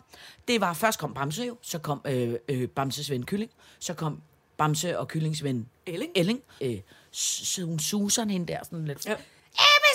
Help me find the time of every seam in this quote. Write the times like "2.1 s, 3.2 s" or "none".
6.6 s, 9.1 s

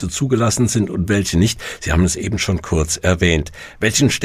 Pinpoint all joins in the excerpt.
none

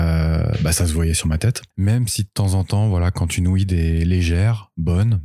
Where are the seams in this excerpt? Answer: 1.7 s

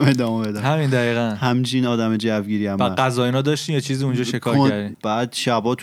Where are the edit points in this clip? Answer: 4.9 s

